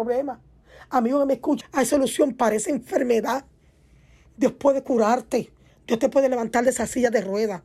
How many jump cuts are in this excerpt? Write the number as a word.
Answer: two